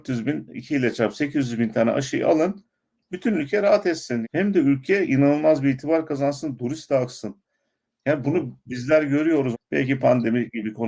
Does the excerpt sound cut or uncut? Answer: cut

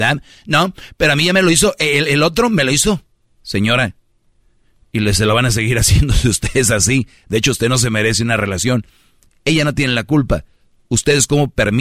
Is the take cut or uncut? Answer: uncut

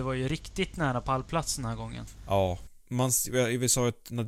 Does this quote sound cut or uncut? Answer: cut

